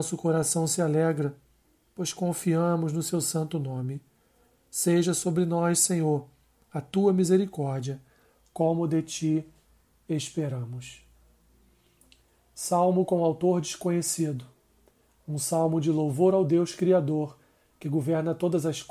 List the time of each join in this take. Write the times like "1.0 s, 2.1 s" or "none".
none